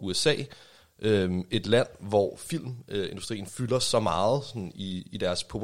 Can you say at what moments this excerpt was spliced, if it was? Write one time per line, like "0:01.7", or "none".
none